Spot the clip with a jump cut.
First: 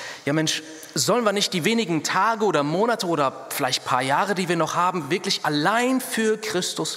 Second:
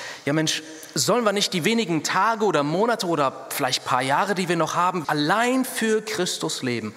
second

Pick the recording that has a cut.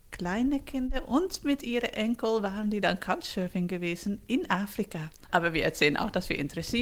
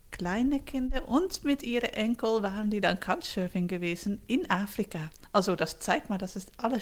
first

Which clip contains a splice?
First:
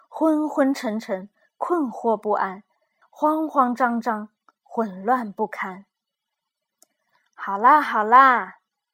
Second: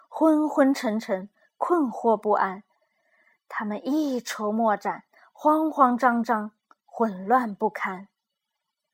first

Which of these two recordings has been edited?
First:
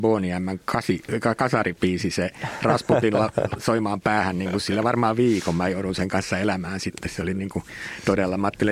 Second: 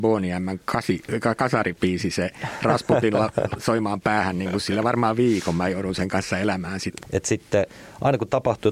second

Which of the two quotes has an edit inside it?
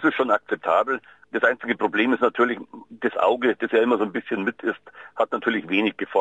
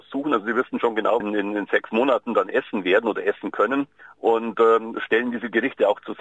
second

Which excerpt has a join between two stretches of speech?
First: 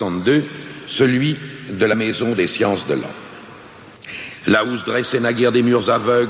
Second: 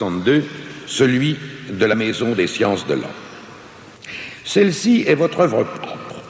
first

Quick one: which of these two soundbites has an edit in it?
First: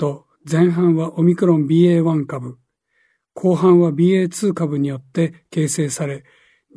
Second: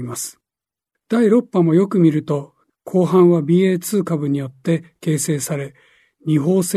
second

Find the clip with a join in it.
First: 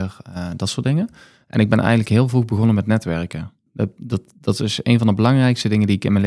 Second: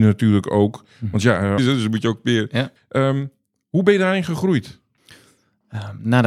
second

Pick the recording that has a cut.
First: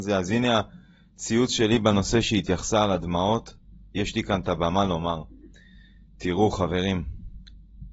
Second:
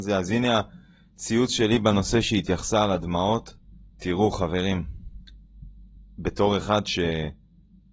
second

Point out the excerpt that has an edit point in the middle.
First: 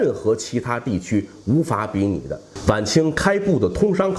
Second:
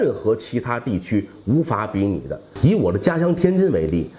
first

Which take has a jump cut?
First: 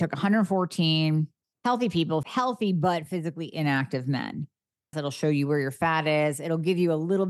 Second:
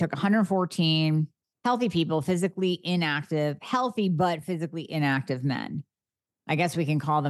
first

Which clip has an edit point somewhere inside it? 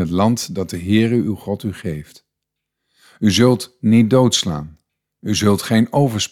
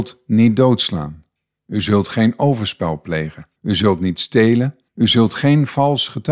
second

